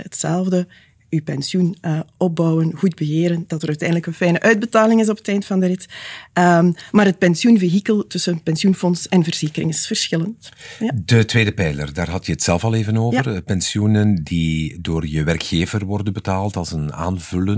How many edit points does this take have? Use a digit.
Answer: 0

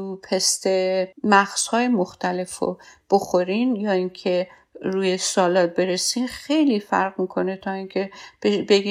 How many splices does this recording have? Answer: 1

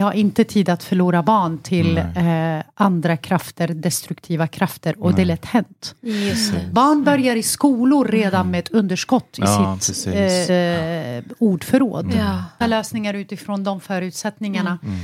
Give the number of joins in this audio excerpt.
2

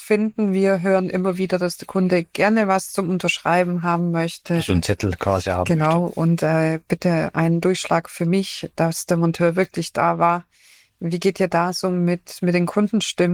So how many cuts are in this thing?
0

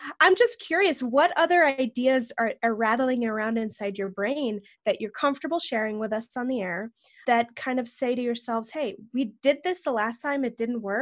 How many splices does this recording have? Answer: 0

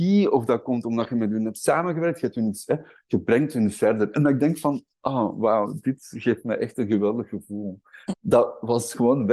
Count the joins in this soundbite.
2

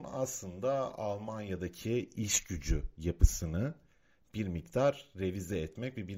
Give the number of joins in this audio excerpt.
0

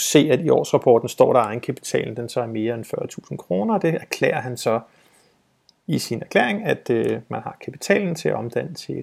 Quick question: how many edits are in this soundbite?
0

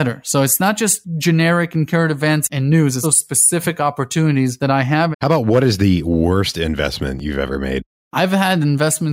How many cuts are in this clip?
2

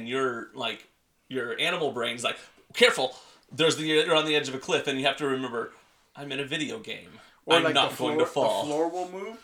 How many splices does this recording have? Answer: 0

